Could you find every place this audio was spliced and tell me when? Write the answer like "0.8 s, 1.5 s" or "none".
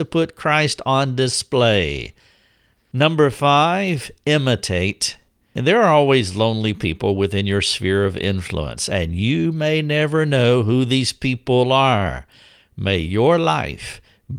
2.7 s